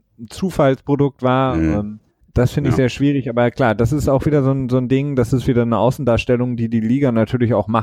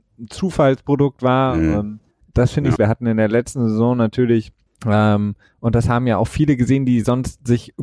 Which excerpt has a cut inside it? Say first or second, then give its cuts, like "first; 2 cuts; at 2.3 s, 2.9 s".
second; 1 cut; at 2.8 s